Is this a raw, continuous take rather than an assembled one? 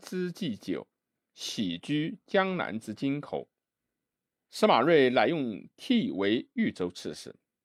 no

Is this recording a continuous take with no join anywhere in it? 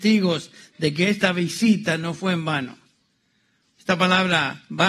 no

